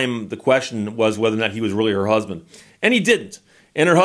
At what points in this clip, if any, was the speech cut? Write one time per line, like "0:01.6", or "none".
none